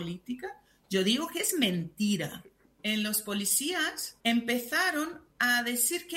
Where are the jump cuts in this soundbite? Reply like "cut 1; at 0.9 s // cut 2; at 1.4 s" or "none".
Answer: cut 1; at 2.8 s // cut 2; at 4.2 s

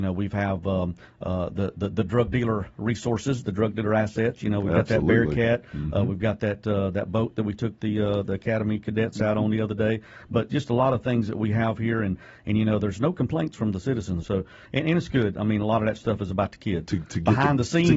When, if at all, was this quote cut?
cut 1; at 14.2 s // cut 2; at 16.9 s

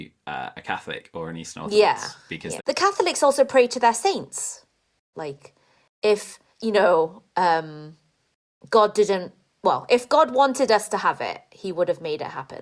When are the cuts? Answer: cut 1; at 2.6 s // cut 2; at 5.1 s // cut 3; at 6.5 s

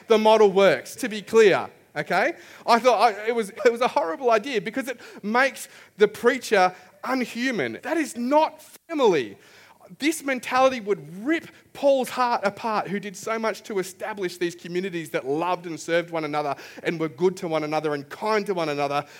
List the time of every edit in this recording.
cut 1; at 1.0 s // cut 2; at 3.6 s // cut 3; at 7.8 s

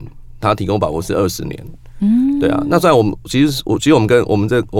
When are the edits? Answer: none

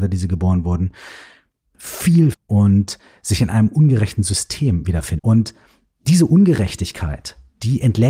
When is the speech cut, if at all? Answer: cut 1; at 2.3 s // cut 2; at 5.2 s

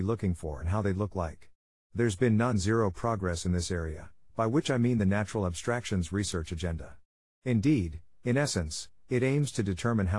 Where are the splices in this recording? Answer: none

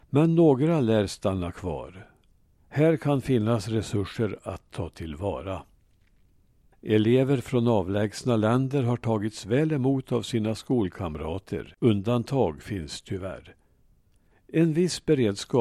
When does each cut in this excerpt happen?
cut 1; at 2.6 s // cut 2; at 6.7 s // cut 3; at 11.8 s

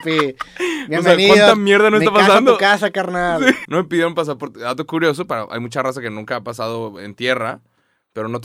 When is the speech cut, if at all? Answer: cut 1; at 3.6 s

